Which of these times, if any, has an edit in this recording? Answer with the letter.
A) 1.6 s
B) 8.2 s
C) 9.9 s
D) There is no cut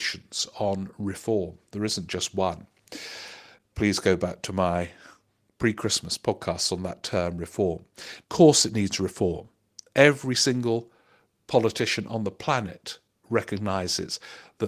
B